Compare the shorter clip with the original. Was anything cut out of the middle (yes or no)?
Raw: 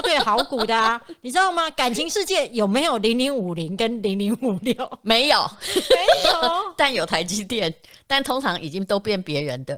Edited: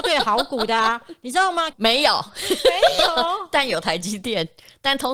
yes